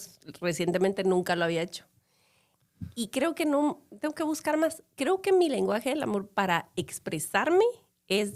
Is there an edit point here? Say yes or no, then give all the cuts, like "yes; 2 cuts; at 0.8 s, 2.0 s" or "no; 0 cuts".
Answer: no; 0 cuts